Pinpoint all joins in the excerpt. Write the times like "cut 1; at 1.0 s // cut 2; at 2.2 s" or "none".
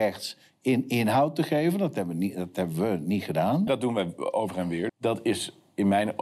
cut 1; at 3.7 s // cut 2; at 4.9 s